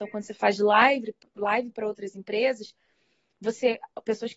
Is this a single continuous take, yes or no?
yes